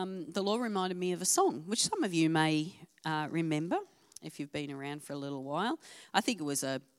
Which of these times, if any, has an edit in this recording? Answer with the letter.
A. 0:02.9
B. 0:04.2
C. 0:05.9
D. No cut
D